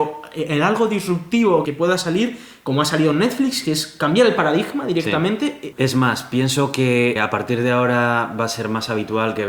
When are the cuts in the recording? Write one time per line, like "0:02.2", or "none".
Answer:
0:01.7
0:05.7
0:07.2

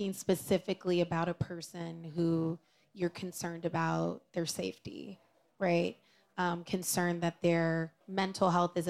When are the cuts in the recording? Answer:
0:08.0

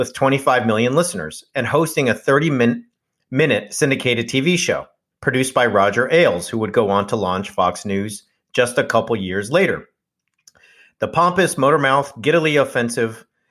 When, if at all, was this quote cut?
none

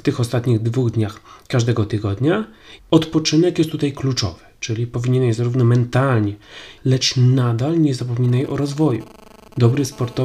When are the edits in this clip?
0:02.8
0:06.8

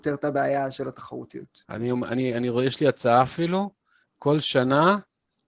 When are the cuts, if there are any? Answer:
none

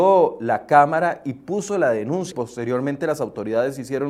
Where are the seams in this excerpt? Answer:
0:02.3

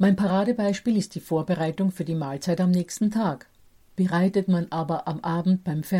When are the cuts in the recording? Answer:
0:03.9

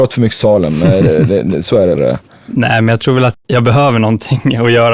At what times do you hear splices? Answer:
0:01.9
0:03.3

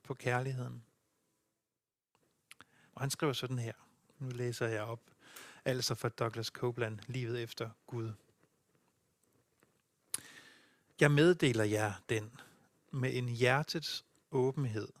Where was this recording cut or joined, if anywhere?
0:02.9
0:12.8

